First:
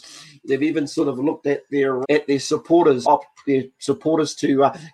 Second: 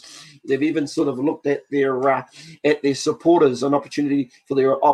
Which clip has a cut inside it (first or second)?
first